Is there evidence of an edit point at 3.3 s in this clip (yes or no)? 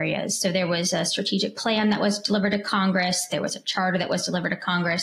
no